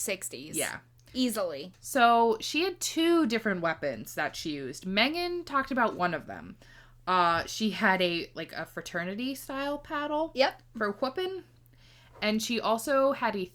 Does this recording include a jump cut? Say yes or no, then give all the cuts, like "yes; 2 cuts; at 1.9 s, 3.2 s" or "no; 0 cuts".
no; 0 cuts